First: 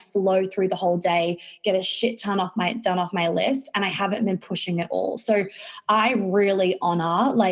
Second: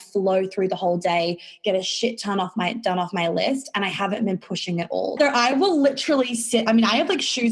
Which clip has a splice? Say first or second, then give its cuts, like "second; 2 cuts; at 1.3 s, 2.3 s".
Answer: second; 1 cut; at 5.2 s